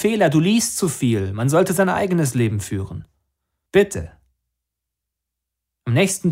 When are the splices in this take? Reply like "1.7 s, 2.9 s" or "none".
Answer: 3.7 s